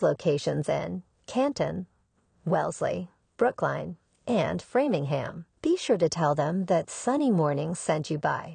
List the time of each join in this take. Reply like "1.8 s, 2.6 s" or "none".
3.2 s, 5.5 s